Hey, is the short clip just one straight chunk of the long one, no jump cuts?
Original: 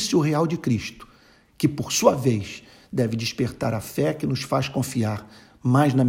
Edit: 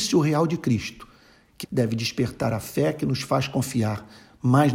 no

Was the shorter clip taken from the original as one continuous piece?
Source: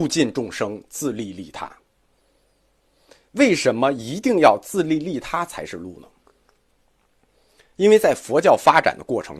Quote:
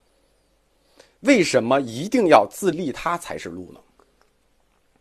no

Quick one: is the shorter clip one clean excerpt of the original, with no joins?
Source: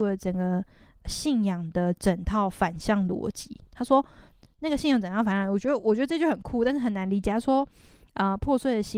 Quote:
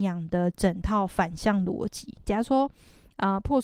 no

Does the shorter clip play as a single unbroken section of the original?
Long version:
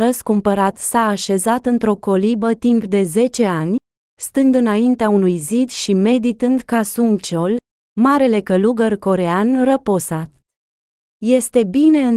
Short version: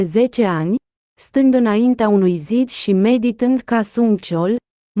yes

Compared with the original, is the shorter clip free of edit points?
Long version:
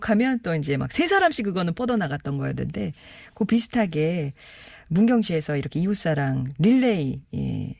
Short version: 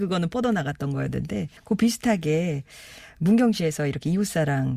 no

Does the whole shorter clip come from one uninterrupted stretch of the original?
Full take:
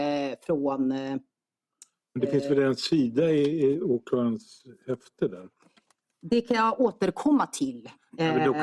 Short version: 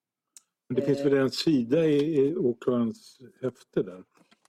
yes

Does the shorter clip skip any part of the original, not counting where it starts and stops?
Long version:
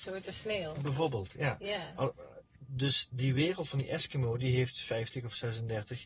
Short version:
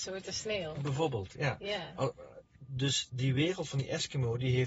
no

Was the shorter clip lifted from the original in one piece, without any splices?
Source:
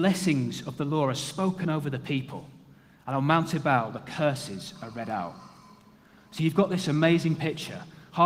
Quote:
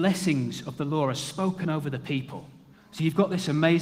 no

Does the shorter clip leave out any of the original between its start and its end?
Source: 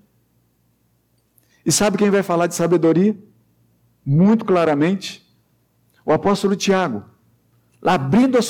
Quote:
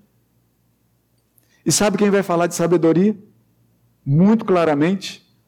no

